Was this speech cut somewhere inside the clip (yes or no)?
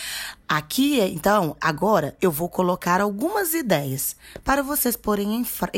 no